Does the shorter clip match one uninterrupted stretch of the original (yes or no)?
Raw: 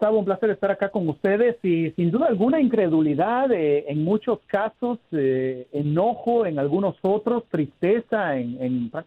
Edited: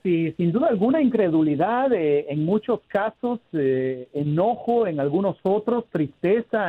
yes